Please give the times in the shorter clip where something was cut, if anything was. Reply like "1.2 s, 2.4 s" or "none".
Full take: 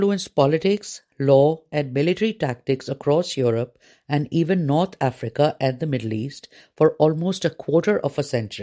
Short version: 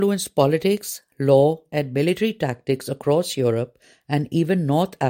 none